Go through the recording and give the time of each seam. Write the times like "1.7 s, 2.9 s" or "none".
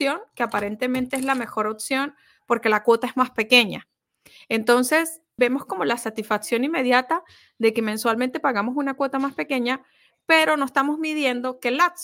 5.4 s

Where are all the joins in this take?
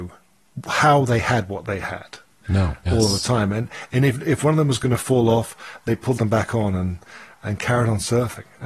2.8 s

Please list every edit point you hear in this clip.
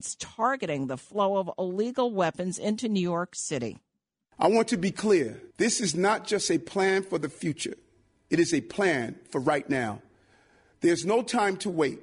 5.5 s, 10.7 s

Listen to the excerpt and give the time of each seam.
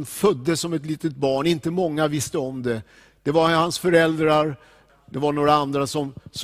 4.9 s

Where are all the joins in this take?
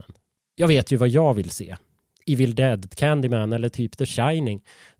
2.9 s

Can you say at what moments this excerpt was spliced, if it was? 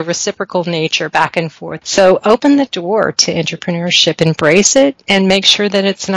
1.8 s

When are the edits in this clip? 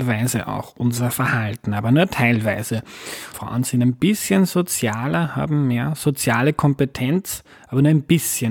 3.3 s

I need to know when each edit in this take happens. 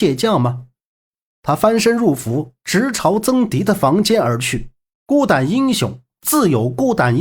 4.9 s

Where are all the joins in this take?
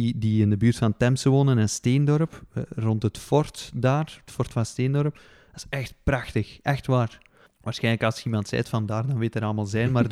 7.5 s

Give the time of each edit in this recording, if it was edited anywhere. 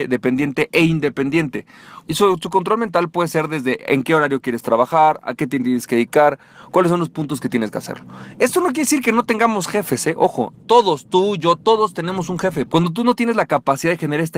2.0 s, 10.6 s, 12.7 s

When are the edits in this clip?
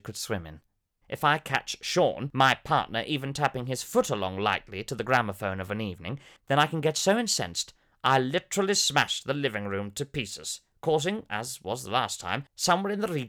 1.0 s

